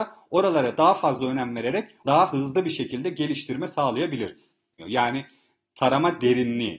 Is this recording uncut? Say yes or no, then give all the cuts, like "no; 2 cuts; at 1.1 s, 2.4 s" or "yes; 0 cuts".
no; 2 cuts; at 2.0 s, 4.8 s